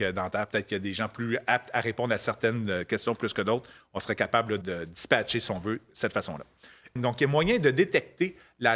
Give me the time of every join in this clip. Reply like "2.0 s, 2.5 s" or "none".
4.6 s, 7.0 s